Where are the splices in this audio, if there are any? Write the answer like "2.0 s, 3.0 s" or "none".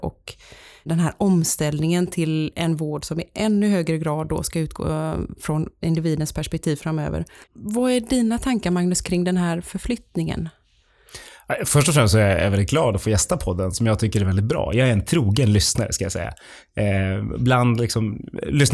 7.4 s